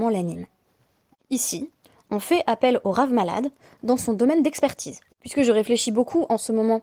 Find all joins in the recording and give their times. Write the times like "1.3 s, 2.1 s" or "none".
5.1 s

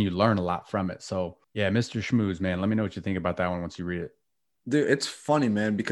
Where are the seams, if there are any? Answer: 1.4 s

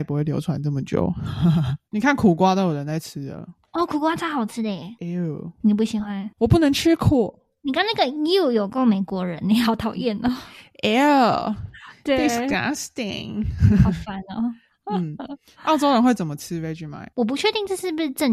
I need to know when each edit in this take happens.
none

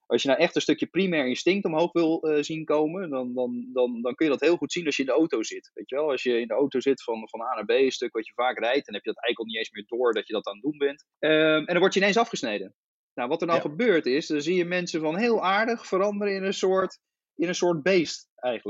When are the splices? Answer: none

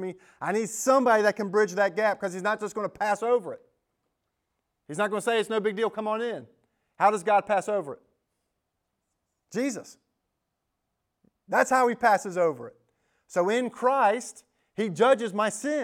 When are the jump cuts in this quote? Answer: none

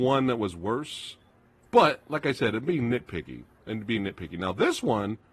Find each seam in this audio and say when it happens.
none

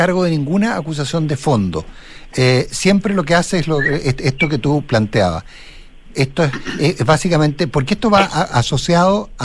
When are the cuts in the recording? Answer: 6.0 s

